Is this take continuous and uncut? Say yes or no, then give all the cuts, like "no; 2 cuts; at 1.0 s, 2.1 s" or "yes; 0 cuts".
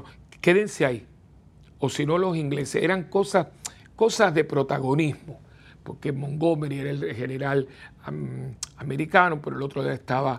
yes; 0 cuts